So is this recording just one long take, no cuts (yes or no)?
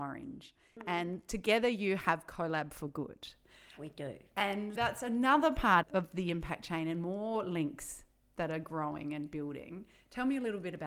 no